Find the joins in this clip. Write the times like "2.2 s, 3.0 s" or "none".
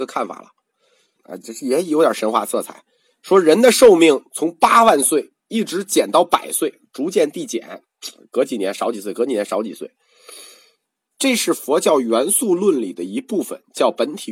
1.2 s, 11.1 s